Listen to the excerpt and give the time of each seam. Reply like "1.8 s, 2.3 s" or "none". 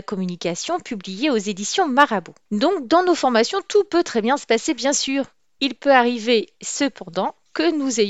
none